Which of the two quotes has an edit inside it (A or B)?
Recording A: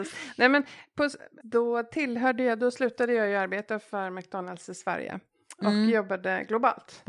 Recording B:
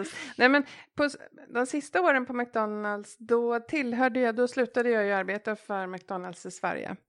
A